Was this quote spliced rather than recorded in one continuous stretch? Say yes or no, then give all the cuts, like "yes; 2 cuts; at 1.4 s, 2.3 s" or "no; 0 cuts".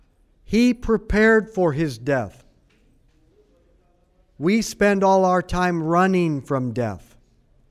no; 0 cuts